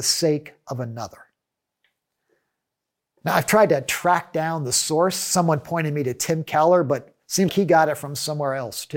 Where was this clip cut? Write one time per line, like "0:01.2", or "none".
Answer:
0:07.5